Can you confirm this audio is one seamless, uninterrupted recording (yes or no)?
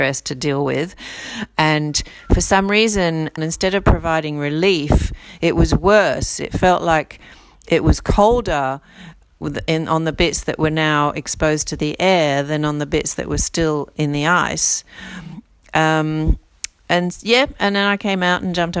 no